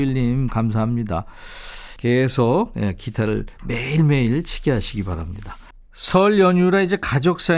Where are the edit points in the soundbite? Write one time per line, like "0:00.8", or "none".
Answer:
0:02.0